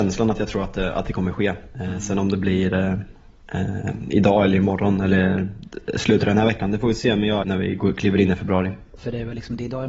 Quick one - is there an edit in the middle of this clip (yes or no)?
yes